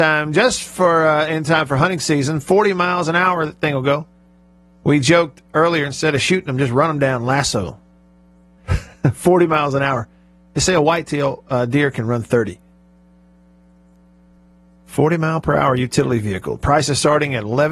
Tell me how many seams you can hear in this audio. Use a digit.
1